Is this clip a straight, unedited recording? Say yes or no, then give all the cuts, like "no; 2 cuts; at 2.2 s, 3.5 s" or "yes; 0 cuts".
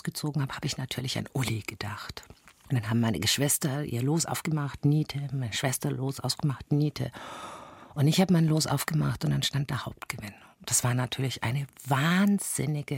yes; 0 cuts